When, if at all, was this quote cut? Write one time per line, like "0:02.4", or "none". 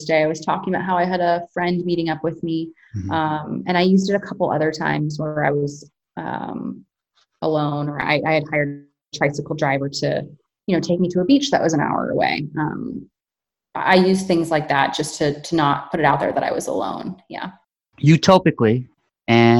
none